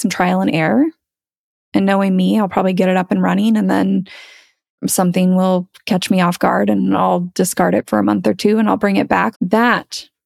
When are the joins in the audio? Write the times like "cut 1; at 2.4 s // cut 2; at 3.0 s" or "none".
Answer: cut 1; at 9.3 s